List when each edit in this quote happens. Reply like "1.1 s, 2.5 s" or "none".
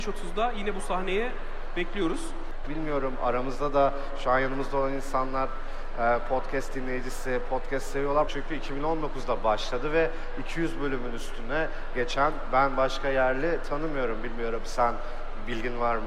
2.6 s, 8.3 s